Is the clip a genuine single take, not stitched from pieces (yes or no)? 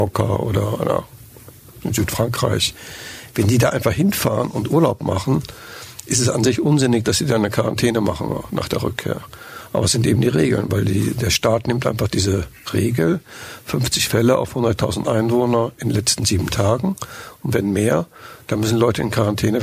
yes